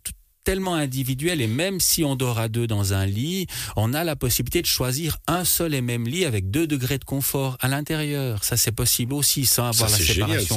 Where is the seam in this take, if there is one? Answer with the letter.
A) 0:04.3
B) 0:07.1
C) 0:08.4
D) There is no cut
D